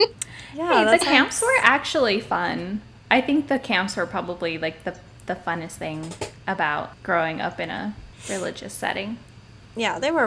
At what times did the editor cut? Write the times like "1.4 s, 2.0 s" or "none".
none